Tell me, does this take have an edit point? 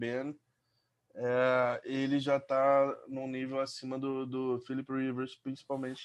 no; 0 cuts

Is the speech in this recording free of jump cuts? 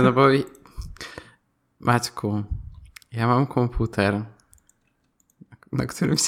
yes; 0 cuts

